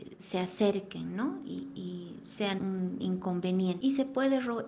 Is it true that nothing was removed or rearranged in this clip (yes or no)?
no